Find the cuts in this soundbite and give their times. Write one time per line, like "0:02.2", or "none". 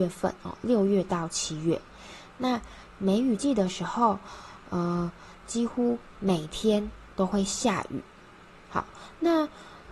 none